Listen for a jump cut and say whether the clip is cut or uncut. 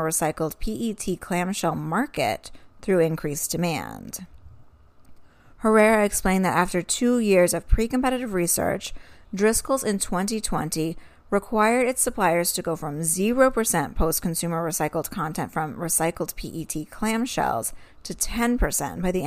uncut